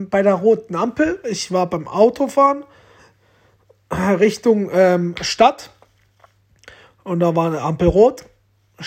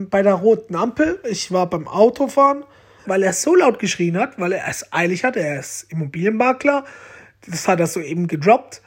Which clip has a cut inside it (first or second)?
second